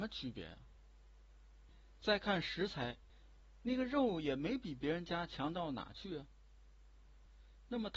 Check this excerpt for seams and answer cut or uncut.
uncut